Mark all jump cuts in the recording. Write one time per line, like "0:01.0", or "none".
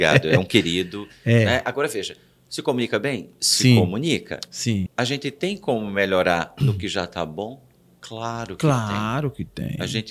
0:04.9